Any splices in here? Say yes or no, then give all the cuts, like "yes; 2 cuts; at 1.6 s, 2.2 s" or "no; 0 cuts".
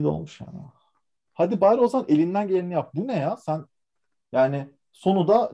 yes; 1 cut; at 1.2 s